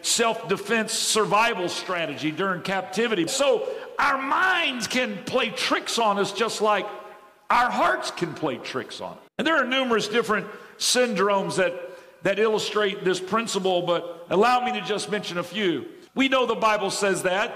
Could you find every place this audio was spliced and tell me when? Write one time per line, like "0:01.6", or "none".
0:03.3
0:09.3
0:16.1